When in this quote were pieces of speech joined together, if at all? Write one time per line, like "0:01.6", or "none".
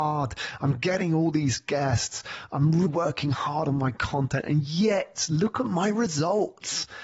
0:02.9